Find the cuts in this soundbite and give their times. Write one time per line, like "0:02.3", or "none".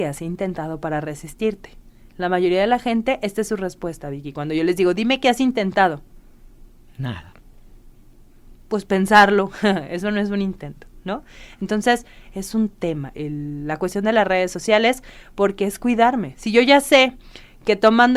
0:13.1